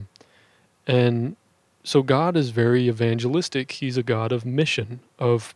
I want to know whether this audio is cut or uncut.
uncut